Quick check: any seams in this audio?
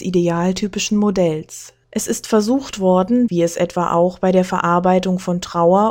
yes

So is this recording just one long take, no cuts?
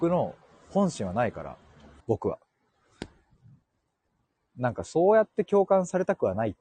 no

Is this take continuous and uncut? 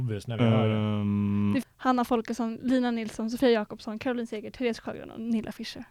no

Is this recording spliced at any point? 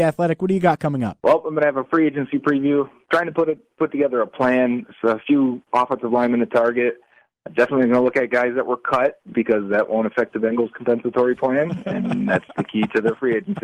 no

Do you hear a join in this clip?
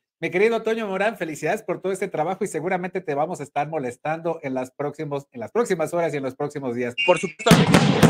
yes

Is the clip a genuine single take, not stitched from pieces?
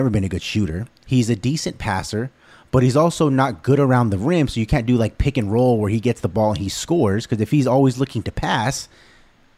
yes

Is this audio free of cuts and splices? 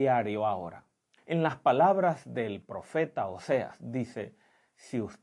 no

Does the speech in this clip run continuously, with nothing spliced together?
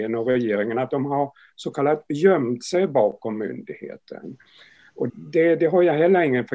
no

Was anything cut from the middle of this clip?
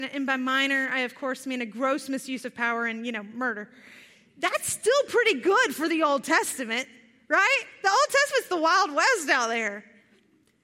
no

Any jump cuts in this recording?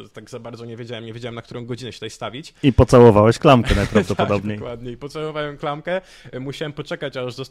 no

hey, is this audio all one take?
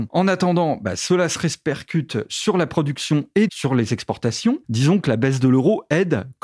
no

